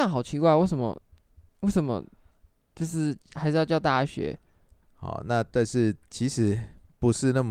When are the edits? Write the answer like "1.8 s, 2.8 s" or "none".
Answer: 4.8 s